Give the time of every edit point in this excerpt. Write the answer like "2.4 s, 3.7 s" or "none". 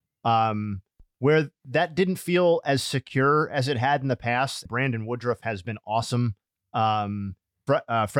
4.7 s